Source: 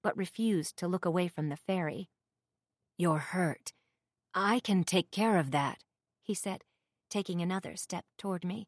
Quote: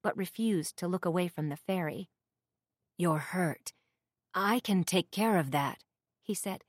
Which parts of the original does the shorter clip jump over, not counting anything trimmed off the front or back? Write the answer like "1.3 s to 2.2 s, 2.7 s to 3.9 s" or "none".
none